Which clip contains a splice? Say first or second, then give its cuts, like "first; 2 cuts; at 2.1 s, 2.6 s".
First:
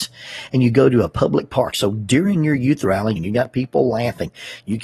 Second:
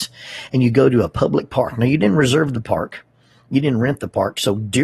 first; 2 cuts; at 1.7 s, 3.2 s